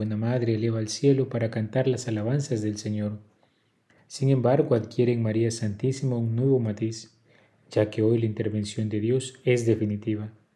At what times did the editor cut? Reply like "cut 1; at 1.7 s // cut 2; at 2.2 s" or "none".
cut 1; at 4.0 s